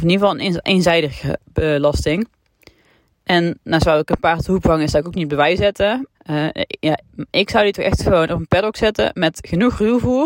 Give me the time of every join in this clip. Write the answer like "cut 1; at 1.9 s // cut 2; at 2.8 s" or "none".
cut 1; at 6.1 s